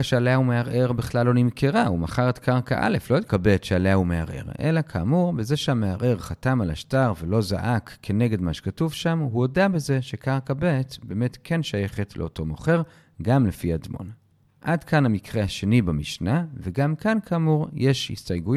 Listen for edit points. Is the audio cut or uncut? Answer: uncut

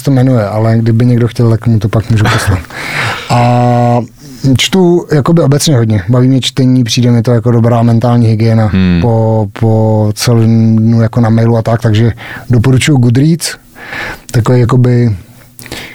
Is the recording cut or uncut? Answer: uncut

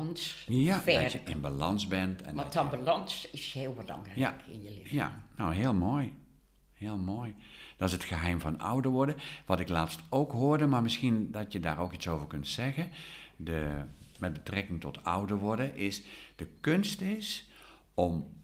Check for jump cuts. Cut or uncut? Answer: uncut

